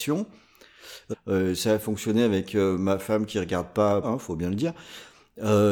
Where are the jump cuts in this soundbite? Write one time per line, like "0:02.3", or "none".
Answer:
0:01.1
0:04.0